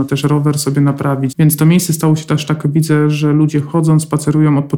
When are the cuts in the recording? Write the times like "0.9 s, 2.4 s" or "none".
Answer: 1.3 s